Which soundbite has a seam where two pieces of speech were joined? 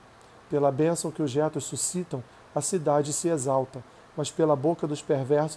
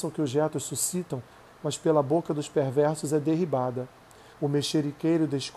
second; 2 cuts; at 1.5 s, 4.3 s

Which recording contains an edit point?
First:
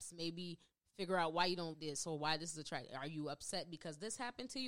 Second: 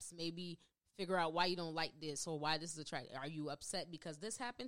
first; 1 cut; at 1.7 s

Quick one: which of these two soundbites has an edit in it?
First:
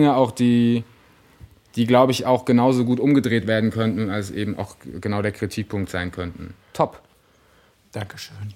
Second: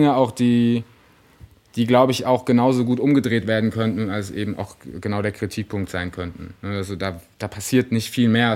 first; 1 cut; at 6.6 s

